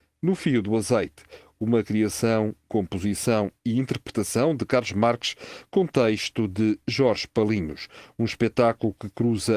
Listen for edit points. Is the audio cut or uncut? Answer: uncut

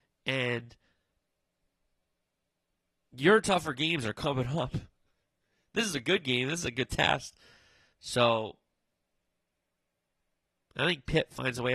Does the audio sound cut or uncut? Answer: cut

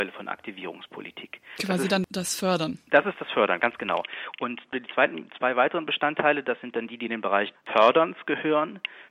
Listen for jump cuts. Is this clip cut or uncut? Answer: uncut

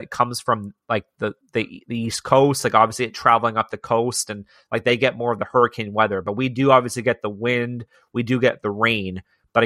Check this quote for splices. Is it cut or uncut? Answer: uncut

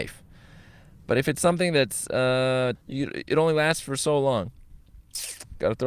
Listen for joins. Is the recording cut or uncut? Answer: cut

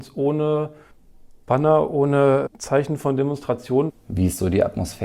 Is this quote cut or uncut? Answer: cut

